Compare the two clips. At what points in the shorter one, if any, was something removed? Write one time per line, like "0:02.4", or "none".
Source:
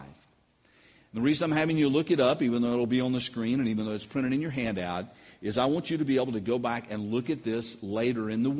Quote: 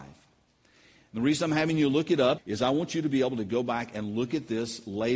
0:02.4